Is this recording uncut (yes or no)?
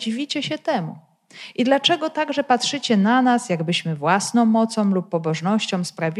yes